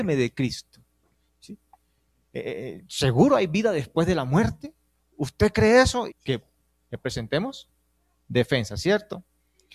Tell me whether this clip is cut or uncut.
cut